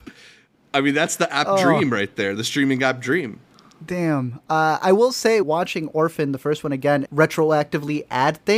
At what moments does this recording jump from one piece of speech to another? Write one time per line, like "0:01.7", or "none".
0:05.4
0:07.1